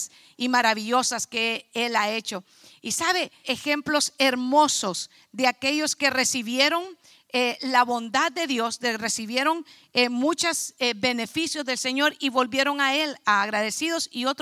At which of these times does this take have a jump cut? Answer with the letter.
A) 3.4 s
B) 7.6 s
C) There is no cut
A